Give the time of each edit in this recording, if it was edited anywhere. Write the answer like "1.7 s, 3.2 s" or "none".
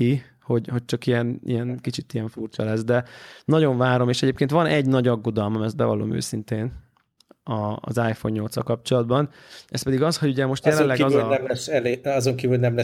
none